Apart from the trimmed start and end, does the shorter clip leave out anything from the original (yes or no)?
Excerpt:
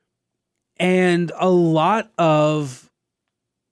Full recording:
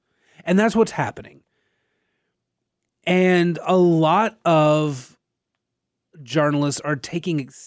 no